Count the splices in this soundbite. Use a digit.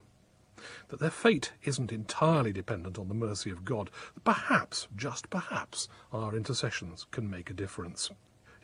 0